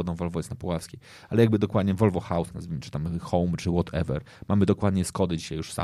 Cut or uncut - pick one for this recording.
uncut